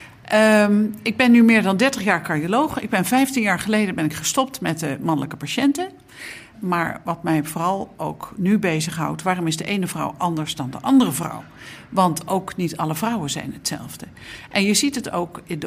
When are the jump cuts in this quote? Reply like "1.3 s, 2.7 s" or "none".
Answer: 6.5 s